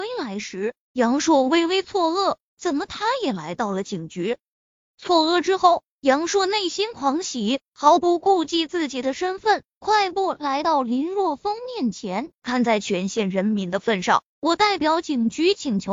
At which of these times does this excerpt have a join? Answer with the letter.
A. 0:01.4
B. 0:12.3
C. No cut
B